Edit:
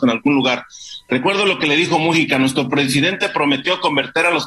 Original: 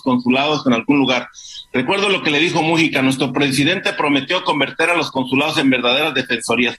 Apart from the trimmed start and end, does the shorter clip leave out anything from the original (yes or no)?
no